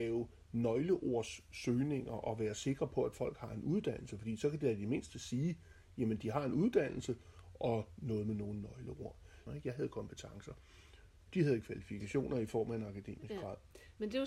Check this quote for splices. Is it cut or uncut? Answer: cut